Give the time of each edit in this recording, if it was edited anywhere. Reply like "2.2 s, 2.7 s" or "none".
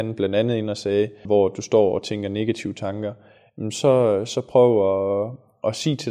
1.2 s